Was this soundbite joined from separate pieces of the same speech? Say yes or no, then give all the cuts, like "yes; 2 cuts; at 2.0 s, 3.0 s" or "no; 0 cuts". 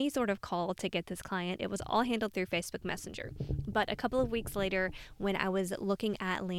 no; 0 cuts